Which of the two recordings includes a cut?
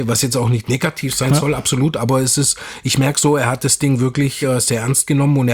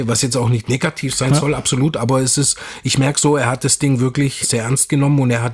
second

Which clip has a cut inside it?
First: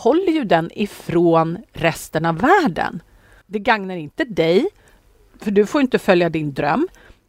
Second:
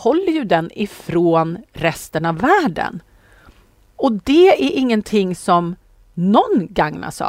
first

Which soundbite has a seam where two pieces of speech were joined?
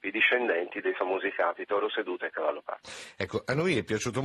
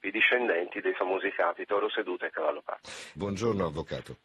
second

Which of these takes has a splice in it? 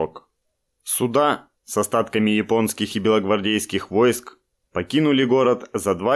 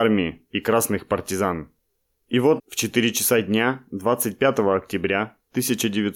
second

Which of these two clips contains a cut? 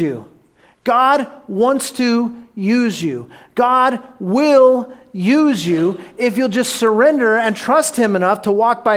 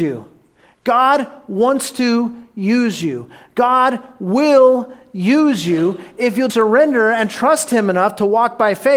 second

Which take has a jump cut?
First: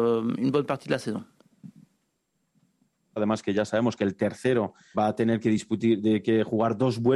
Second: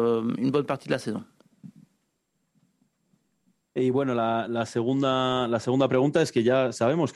first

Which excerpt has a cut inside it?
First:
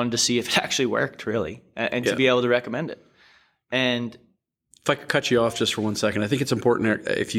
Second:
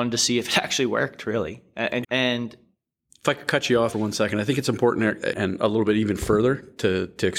second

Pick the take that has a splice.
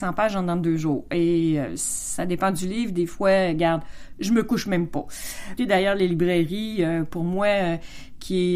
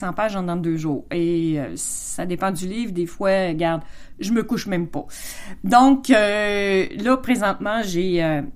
first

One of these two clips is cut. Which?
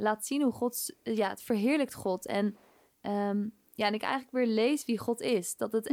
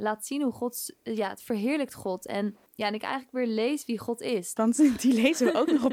second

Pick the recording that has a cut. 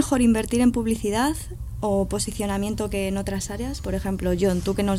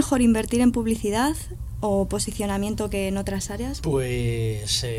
second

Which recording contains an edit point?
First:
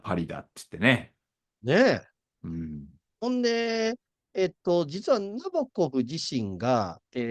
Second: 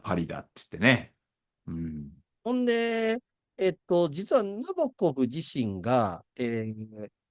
second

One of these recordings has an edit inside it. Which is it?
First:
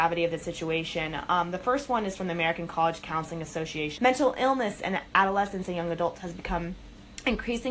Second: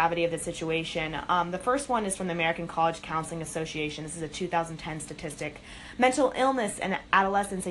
first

